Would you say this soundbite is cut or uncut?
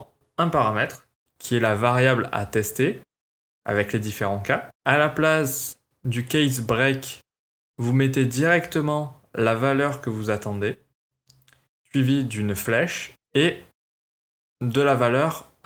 cut